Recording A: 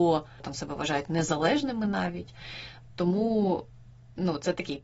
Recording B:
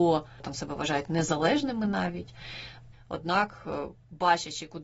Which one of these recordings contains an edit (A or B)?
B